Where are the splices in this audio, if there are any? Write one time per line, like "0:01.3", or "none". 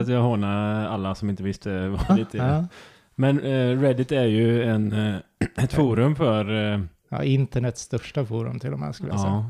0:02.1